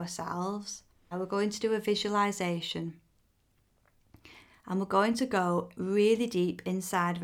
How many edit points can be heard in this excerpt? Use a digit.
1